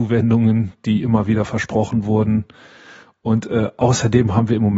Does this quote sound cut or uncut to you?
uncut